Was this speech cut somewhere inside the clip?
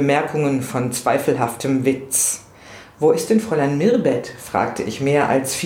no; 0 cuts

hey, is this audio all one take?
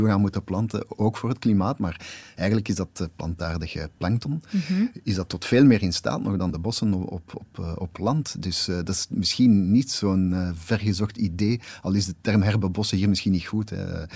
yes; 0 cuts

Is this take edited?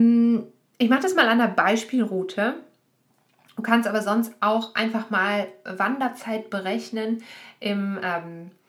no; 0 cuts

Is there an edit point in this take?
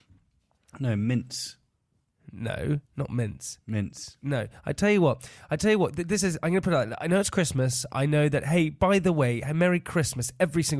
yes; 1 cut; at 2.9 s

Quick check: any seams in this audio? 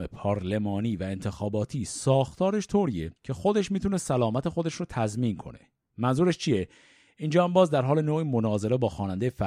yes; 1 cut; at 3.2 s

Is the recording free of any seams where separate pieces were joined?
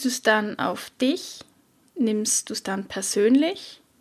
yes; 0 cuts

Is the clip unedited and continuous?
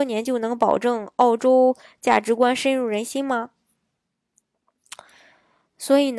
yes; 0 cuts

